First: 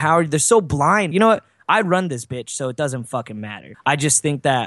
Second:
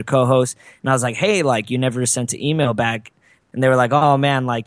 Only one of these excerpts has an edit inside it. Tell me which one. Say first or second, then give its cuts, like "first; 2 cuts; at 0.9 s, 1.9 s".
first; 2 cuts; at 1.1 s, 3.7 s